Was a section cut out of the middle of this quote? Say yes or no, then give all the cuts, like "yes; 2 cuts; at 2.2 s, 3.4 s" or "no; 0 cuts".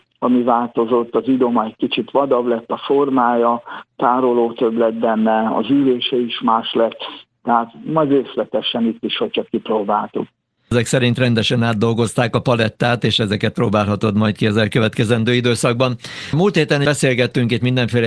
no; 0 cuts